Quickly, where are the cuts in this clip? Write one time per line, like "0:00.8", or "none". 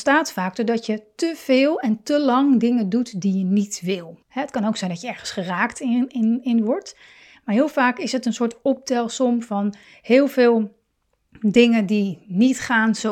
0:04.2